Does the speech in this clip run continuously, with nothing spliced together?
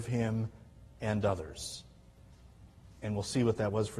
yes; 0 cuts

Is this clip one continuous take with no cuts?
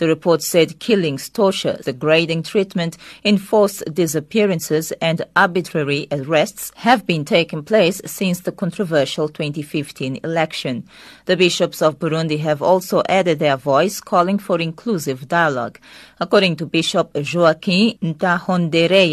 no; 1 cut; at 1.8 s

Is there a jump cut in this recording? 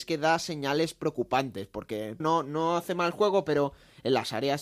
yes; 1 cut; at 2.2 s

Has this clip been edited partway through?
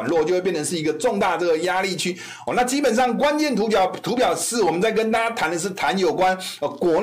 no; 0 cuts

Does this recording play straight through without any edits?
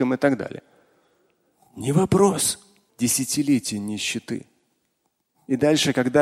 no; 1 cut; at 2.9 s

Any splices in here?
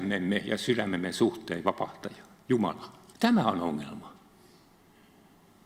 yes; 1 cut; at 3.1 s

